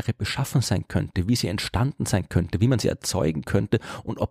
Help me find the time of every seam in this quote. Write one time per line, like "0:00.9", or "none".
none